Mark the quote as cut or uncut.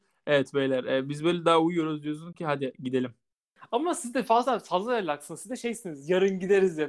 uncut